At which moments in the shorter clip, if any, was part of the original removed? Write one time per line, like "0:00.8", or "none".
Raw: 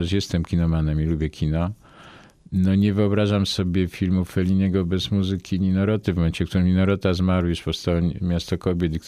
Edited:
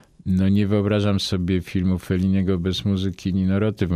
none